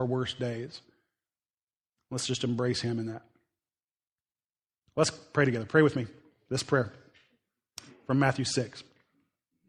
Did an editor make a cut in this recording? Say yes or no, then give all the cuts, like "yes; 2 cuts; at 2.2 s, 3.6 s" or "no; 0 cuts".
no; 0 cuts